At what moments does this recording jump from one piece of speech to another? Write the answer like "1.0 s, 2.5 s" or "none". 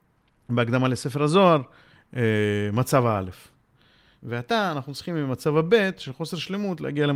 4.2 s